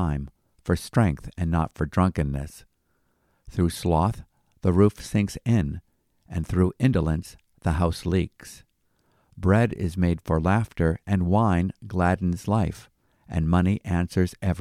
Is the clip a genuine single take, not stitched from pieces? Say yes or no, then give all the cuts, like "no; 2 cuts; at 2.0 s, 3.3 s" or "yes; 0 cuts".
yes; 0 cuts